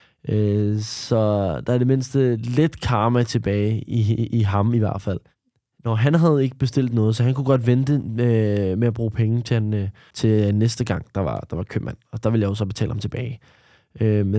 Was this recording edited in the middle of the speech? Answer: no; 0 cuts

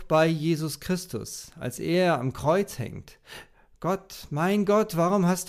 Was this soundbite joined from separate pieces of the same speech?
no; 0 cuts

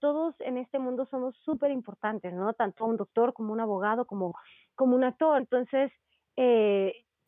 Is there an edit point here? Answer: yes; 1 cut; at 5.4 s

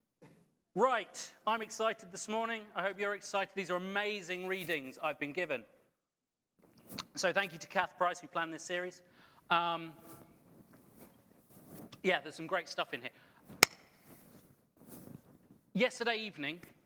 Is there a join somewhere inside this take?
no; 0 cuts

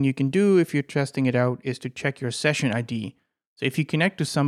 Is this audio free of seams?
yes; 0 cuts

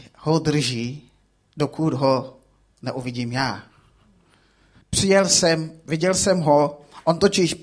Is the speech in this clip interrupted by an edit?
yes; 1 cut; at 4.8 s

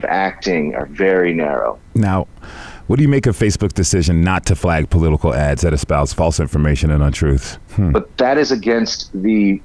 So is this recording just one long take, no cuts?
no; 1 cut; at 7.7 s

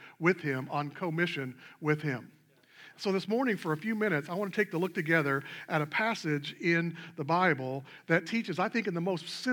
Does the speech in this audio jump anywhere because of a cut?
no; 0 cuts

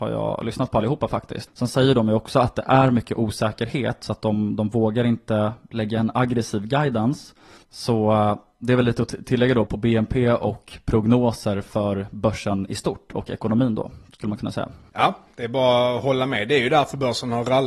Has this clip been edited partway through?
yes; 3 cuts; at 1.5 s, 7.6 s, 9.7 s

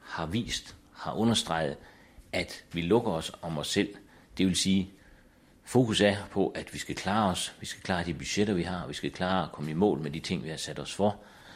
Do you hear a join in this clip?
no; 0 cuts

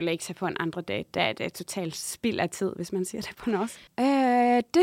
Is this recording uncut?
no; 1 cut; at 3.9 s

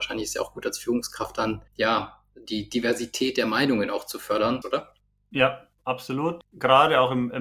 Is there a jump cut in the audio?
yes; 2 cuts; at 1.7 s, 4.6 s

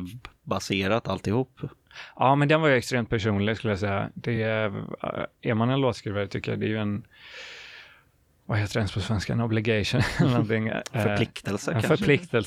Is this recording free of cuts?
yes; 0 cuts

